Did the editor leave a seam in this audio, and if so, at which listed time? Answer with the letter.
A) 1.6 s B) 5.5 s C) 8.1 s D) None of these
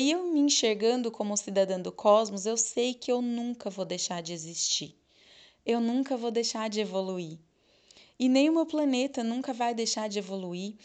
D